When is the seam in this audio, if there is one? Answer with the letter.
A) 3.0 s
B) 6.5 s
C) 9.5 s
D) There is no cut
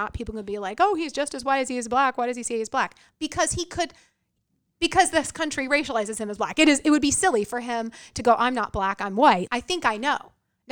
C